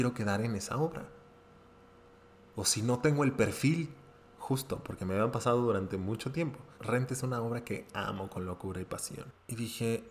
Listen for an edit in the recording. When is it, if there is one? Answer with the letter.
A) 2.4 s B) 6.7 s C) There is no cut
B